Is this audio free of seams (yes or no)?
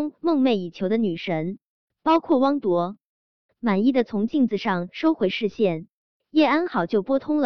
yes